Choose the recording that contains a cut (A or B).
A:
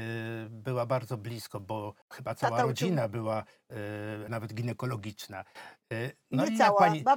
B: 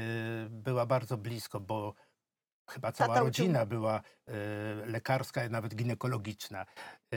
A